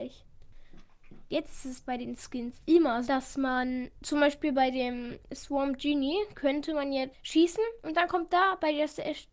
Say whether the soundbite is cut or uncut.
cut